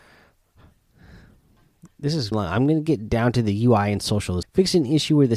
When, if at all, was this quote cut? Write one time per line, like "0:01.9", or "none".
0:02.3
0:04.4